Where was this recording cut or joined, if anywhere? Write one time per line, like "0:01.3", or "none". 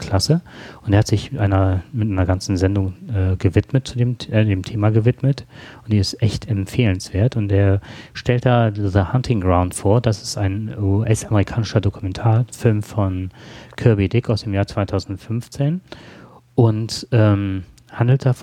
none